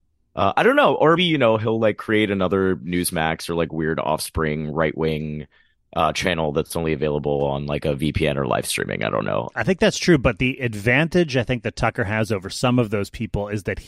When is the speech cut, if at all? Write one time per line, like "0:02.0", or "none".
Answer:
0:01.2
0:09.5